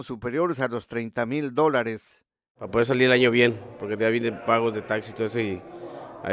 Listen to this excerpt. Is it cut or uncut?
uncut